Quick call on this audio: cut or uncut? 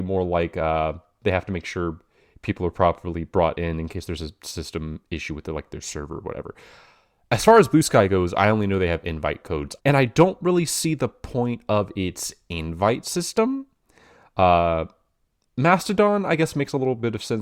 cut